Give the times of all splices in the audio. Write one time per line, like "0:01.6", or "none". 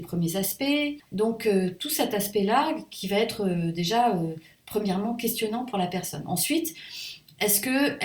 0:01.1